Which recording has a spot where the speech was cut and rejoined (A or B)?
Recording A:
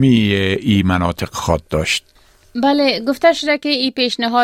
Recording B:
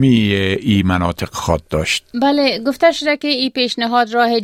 B